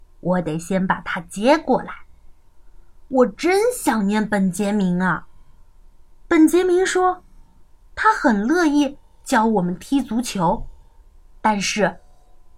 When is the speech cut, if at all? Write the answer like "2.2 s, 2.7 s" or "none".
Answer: none